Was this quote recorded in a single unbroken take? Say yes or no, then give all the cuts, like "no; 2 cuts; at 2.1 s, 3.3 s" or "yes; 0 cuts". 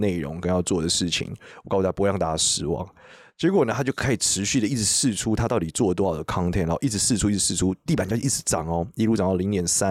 yes; 0 cuts